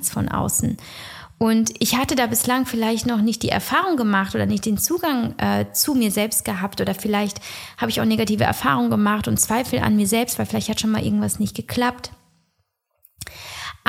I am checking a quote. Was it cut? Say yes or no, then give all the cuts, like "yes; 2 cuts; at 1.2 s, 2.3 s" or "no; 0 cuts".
no; 0 cuts